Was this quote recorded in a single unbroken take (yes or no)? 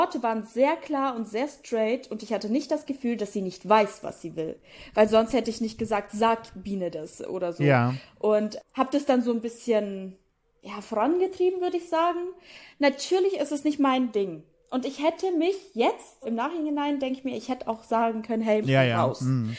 no